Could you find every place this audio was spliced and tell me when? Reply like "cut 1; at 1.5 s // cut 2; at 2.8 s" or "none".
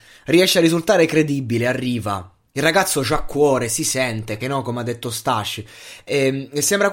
cut 1; at 4.4 s